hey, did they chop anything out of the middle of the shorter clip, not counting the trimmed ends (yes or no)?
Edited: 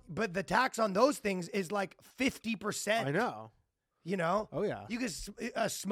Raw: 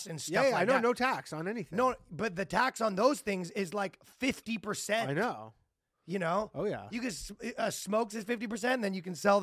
no